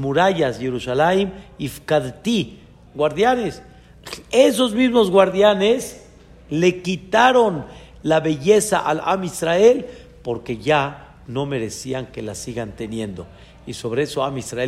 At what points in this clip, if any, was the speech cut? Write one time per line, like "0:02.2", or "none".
0:02.9